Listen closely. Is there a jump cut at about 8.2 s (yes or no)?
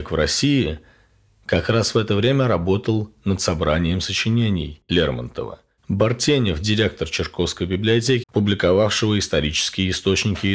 yes